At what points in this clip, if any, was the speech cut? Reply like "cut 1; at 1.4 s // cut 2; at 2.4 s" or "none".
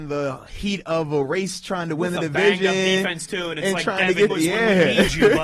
cut 1; at 4.3 s